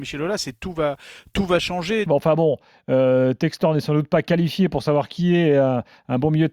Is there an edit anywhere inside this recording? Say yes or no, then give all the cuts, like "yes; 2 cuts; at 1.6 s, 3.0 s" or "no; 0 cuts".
yes; 1 cut; at 2.1 s